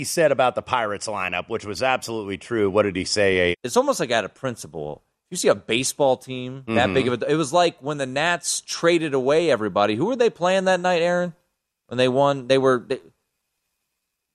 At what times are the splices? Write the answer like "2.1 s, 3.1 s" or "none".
3.5 s